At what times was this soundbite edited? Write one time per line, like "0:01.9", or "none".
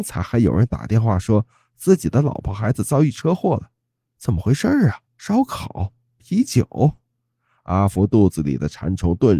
0:05.1